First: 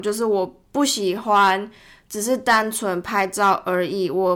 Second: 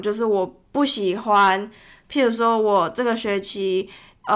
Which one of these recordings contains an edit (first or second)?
second